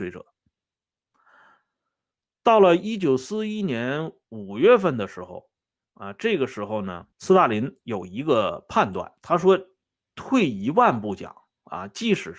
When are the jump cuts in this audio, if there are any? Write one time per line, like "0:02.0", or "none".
0:07.1
0:09.2

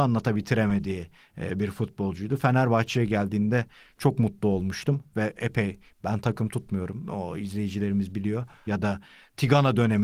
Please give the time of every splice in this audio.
0:08.7

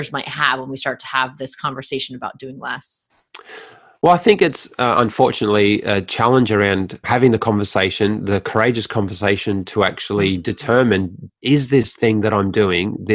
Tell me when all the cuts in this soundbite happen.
0:07.0
0:11.4

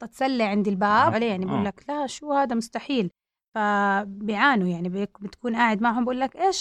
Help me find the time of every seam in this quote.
0:01.1

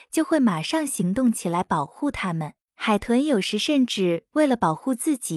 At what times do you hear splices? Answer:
0:02.6

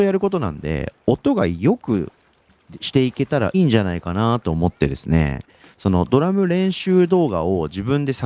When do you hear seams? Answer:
0:03.5

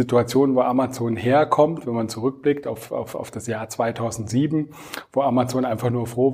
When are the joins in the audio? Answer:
none

